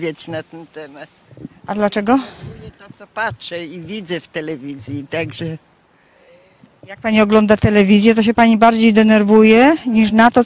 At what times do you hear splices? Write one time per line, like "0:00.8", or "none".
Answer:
none